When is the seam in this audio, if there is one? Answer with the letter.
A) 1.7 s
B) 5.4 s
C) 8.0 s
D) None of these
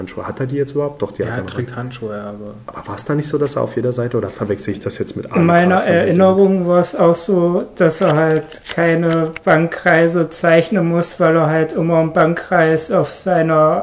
D